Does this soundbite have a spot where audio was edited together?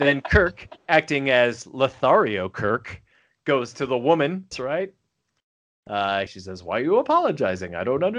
yes; 2 cuts; at 4.5 s, 6.3 s

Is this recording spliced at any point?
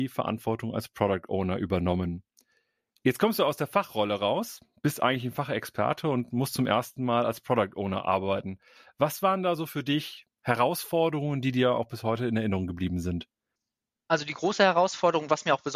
no; 0 cuts

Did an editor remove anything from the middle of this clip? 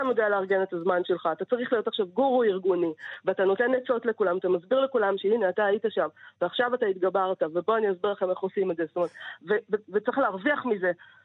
no; 0 cuts

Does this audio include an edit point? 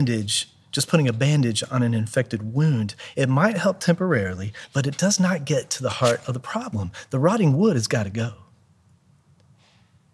no; 0 cuts

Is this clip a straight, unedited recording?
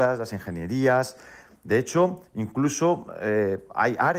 yes; 0 cuts

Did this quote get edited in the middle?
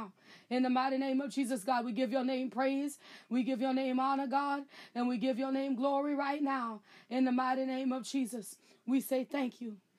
no; 0 cuts

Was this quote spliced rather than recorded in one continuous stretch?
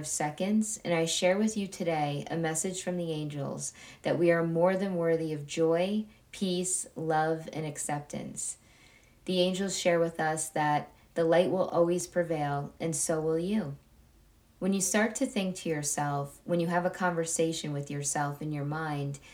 no; 0 cuts

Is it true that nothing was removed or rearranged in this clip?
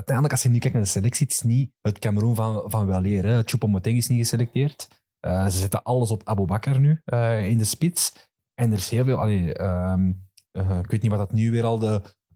no; 1 cut; at 1.8 s

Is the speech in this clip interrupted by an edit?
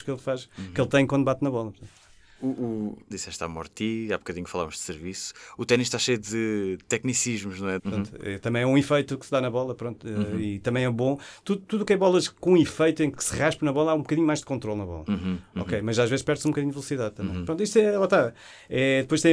yes; 3 cuts; at 3.1 s, 7.8 s, 13.1 s

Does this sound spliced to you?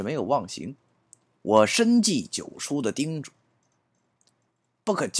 no; 0 cuts

